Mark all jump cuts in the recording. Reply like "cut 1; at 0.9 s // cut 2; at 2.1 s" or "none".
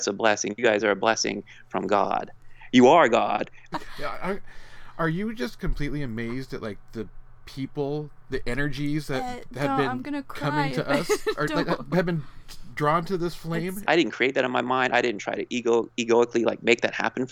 cut 1; at 3.7 s // cut 2; at 13.9 s